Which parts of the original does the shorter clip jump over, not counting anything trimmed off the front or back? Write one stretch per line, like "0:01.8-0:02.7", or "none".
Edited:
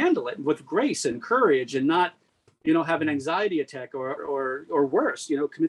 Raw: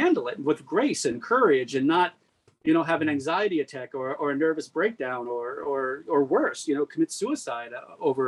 0:04.2-0:05.5